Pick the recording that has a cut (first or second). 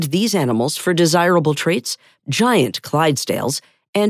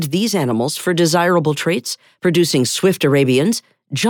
first